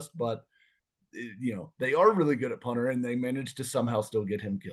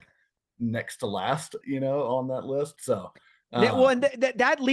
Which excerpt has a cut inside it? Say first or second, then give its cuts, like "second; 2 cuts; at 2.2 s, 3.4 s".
second; 2 cuts; at 1.6 s, 2.8 s